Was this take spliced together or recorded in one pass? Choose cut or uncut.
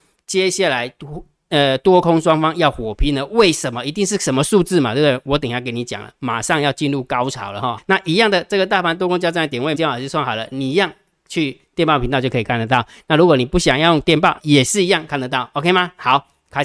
cut